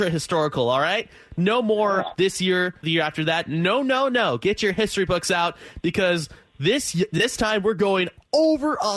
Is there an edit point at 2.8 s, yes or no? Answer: yes